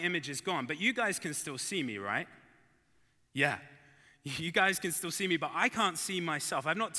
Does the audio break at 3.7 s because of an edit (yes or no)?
no